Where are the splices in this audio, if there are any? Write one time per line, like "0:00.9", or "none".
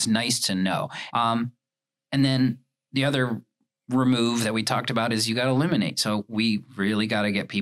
0:01.1